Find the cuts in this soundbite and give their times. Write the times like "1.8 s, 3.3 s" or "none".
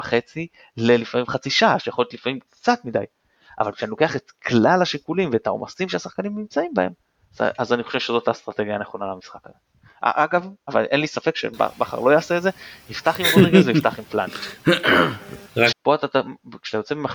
15.7 s